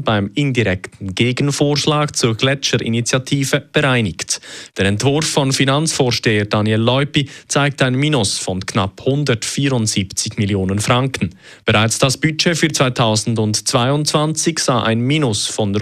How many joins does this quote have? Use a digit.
1